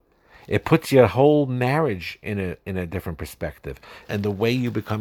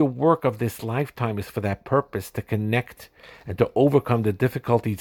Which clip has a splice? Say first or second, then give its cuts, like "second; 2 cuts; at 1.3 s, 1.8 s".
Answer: first; 1 cut; at 4.0 s